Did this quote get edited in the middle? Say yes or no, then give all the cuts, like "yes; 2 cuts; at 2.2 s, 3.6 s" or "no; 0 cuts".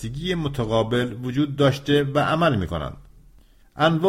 no; 0 cuts